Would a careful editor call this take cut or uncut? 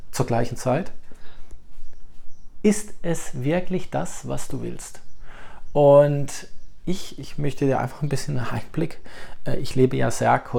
uncut